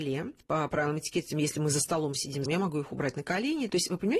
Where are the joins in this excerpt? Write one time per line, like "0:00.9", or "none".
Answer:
0:01.3
0:02.5